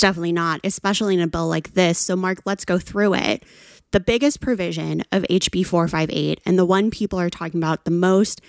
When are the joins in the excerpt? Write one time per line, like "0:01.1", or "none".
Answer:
none